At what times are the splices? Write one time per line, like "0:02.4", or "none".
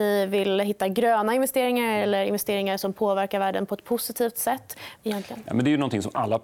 0:05.0

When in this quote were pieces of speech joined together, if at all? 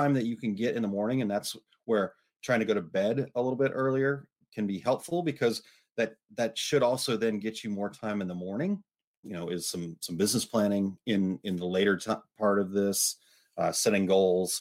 0:09.2

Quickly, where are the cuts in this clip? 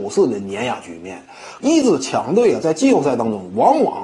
0:01.6

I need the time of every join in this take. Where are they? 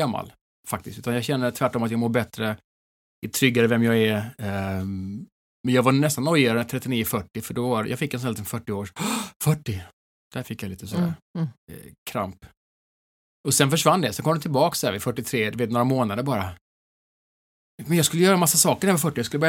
none

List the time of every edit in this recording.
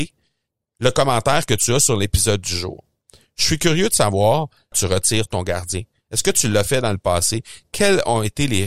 0:04.7

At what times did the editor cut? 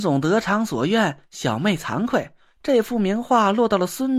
0:02.4

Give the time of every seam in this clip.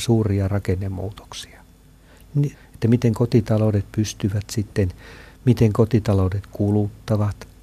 0:02.5

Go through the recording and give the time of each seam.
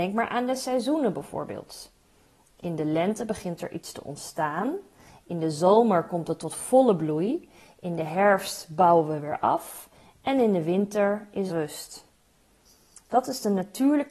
0:11.5

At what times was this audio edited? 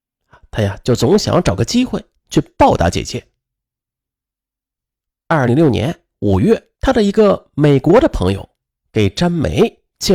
0:05.5
0:06.7

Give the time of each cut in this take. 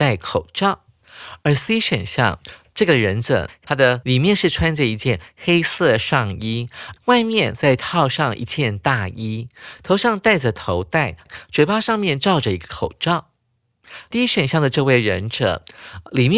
0:07.0
0:09.8

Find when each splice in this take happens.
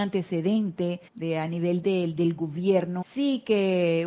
0:01.1
0:03.0

